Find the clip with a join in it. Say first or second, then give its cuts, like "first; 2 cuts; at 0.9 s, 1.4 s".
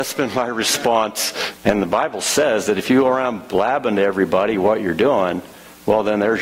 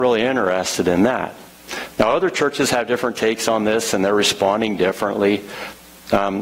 first; 1 cut; at 1.6 s